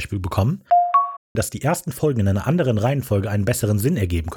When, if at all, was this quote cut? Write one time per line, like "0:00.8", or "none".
0:01.4